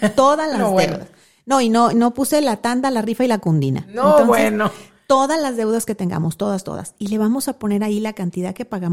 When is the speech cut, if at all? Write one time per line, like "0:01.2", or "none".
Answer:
none